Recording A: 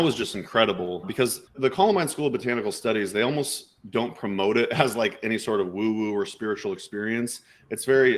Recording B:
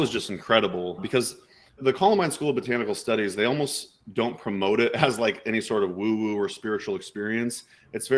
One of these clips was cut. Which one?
A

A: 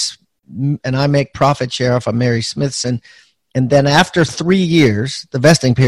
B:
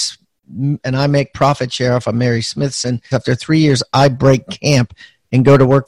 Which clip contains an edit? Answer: B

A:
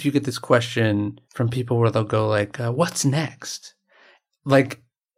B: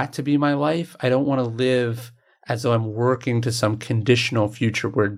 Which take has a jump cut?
A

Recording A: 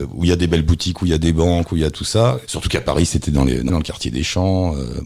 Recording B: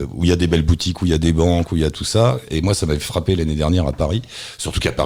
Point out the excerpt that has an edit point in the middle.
A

